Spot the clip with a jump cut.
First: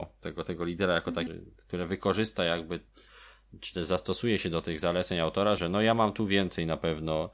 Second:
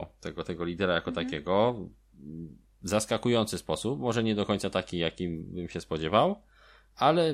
first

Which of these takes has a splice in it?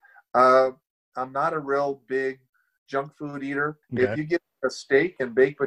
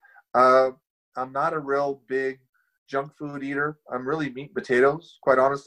first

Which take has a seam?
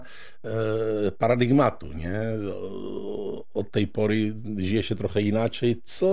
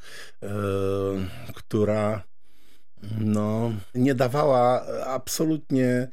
second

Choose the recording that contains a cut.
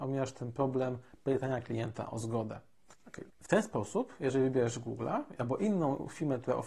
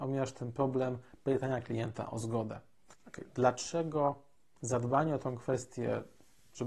first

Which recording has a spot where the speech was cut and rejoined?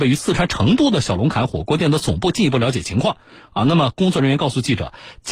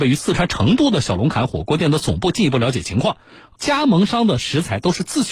second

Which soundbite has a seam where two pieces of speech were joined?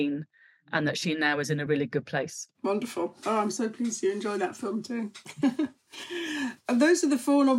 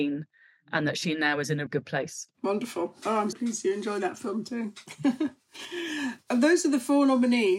second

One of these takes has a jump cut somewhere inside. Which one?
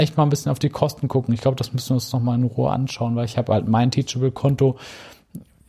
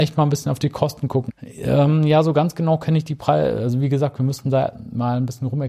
second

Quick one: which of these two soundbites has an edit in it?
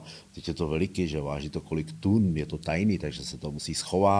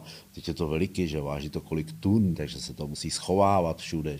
second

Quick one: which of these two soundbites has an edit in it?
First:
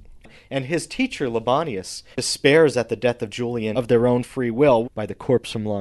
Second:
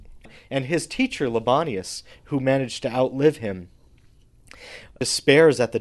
first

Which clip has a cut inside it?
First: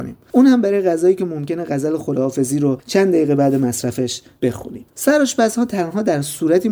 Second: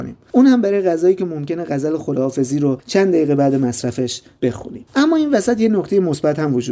first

